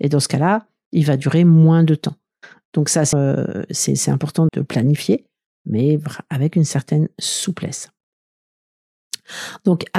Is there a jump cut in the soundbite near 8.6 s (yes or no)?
no